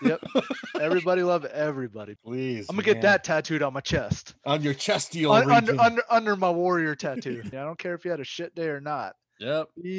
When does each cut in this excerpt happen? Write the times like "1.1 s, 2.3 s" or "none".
2.2 s, 7.5 s